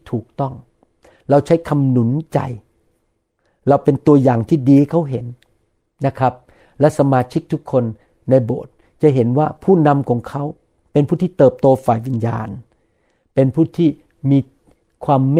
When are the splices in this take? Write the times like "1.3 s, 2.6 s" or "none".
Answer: none